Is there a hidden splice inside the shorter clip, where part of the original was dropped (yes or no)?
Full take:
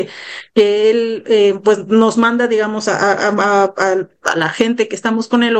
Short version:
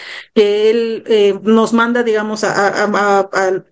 yes